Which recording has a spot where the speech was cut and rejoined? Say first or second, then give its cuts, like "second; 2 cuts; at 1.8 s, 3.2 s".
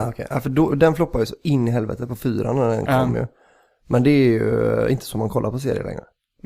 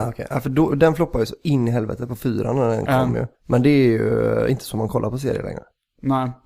second; 1 cut; at 3.3 s